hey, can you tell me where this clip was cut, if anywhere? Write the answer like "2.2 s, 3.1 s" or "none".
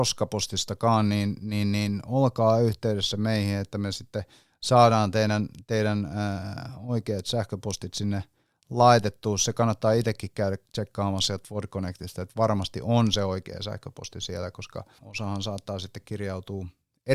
15.0 s